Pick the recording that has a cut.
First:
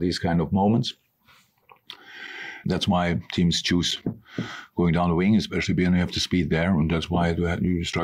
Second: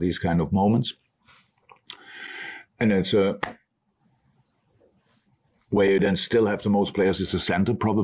first; 1 cut; at 2.6 s

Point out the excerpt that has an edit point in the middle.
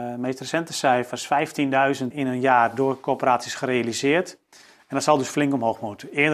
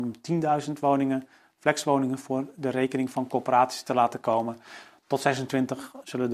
first; 1 cut; at 2.1 s

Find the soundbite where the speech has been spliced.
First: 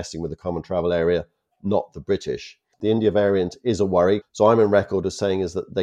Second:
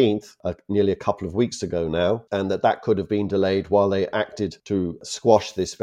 first; 2 cuts; at 2.7 s, 4.2 s

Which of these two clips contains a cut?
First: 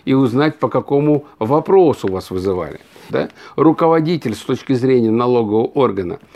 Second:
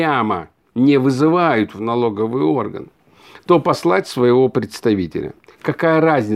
first; 1 cut; at 3.1 s

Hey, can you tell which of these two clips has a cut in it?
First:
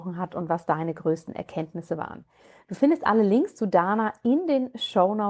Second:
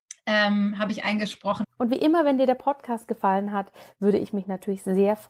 second; 1 cut; at 1.6 s

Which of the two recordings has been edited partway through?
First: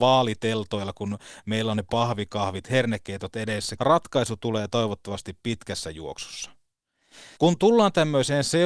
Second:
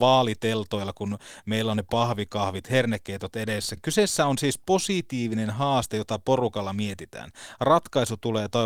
first; 2 cuts; at 3.8 s, 7.4 s

